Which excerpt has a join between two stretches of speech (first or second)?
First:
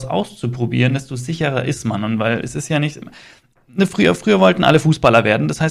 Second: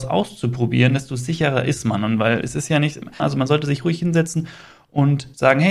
second